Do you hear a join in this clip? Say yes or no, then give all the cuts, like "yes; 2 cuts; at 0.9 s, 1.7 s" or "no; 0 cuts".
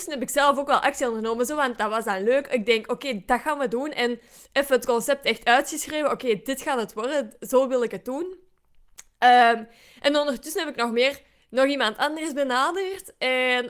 no; 0 cuts